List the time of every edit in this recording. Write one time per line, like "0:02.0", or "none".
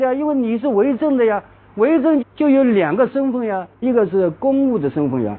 0:02.2
0:03.8